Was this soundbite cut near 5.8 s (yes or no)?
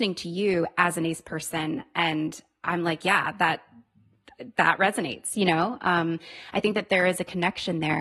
no